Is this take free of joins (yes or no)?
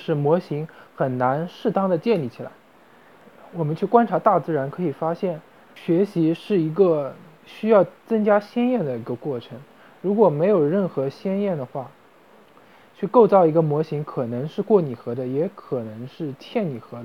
yes